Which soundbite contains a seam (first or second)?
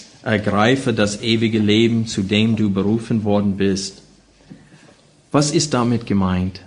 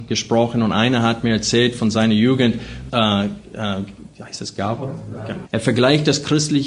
second